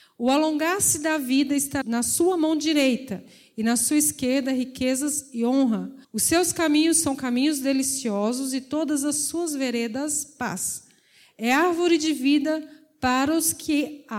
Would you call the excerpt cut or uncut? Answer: cut